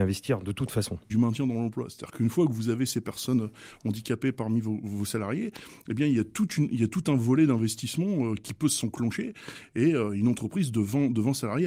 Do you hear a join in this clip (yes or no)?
yes